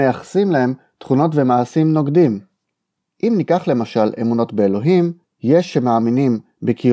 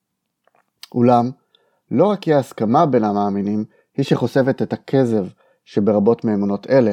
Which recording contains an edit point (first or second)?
first